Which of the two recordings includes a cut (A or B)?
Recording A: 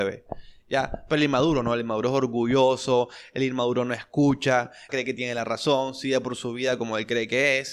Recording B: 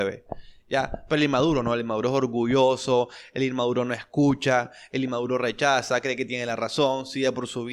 A